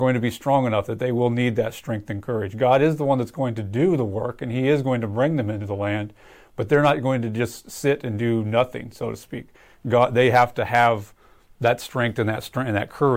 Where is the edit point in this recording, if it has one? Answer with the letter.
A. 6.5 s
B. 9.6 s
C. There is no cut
C